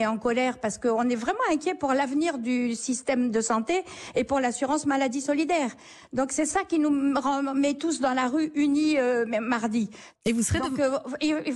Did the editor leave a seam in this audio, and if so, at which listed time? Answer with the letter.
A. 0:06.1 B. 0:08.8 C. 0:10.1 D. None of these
C